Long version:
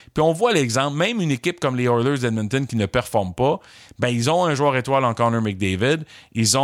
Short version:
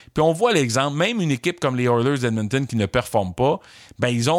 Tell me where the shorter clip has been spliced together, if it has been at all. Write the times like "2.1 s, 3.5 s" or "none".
none

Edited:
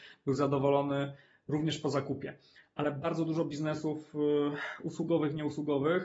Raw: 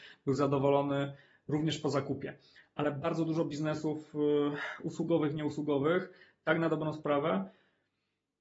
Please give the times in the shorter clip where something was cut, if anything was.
none

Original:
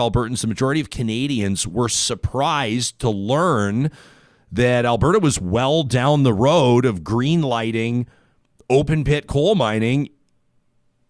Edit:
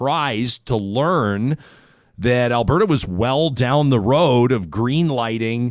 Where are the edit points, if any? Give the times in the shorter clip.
none

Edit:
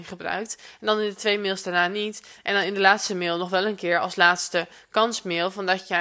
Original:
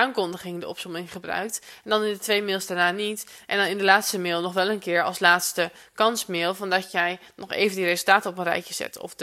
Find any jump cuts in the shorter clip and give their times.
none

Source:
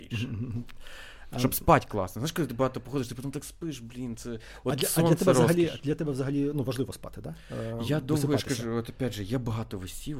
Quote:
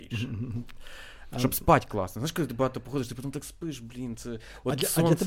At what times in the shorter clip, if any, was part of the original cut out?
none

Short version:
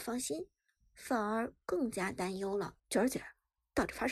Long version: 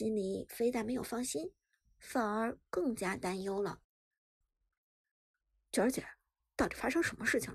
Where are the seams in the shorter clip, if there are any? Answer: 2.8 s

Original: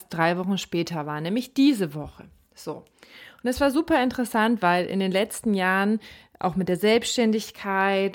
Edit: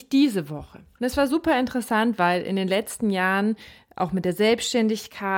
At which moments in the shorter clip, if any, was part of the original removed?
1.0 s

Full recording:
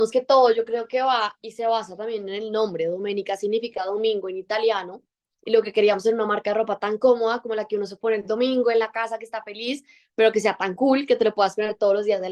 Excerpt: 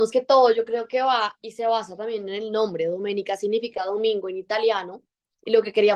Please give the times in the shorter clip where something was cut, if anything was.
none

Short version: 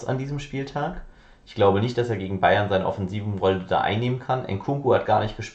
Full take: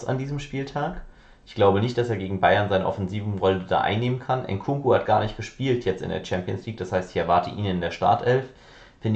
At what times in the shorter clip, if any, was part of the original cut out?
none

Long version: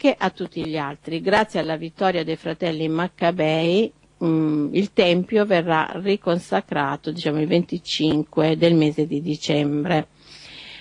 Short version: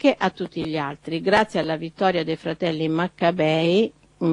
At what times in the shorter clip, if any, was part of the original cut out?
none

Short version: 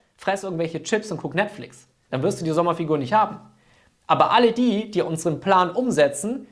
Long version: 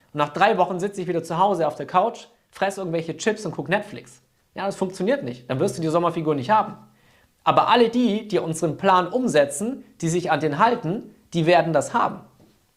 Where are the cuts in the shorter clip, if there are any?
2.1 s

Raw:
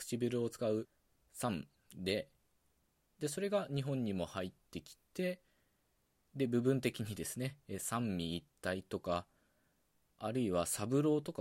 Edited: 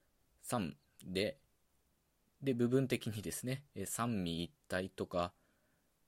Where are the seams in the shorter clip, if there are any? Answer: 2.3 s

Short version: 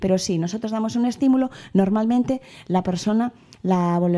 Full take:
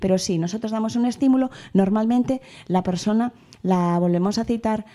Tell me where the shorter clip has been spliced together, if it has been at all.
none

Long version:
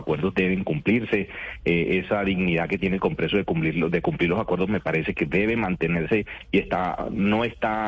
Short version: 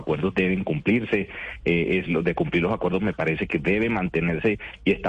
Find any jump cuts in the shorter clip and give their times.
2.1 s

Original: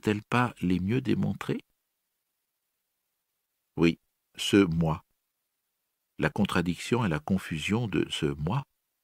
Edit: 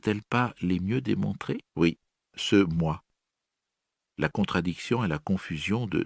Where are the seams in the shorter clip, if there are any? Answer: 1.7 s

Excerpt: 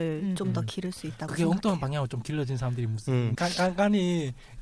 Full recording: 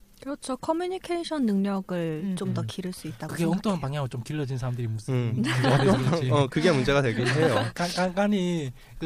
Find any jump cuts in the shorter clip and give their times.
3.3 s

